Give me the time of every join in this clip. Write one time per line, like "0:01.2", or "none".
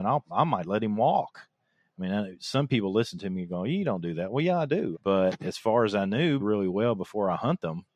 0:04.9
0:06.4